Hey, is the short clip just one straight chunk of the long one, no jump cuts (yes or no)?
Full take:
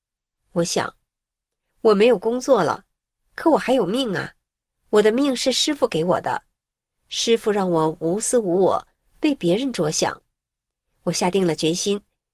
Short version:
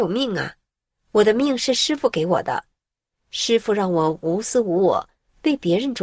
yes